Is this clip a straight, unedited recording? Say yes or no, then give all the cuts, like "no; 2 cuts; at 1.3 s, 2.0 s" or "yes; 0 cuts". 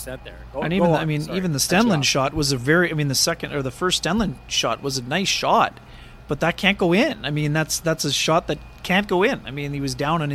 yes; 0 cuts